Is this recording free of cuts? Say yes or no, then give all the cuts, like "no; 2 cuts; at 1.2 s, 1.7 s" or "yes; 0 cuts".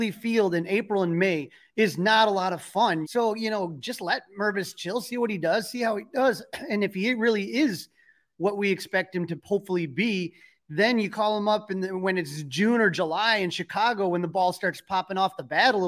no; 1 cut; at 3.0 s